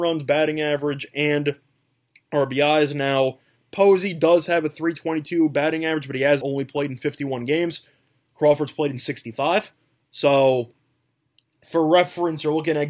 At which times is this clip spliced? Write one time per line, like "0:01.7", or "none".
0:06.4

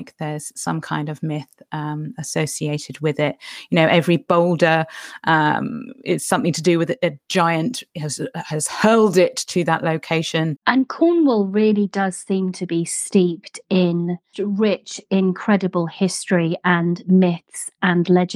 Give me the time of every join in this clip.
0:10.6
0:14.3

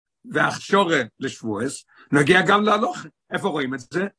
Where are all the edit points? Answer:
0:03.2

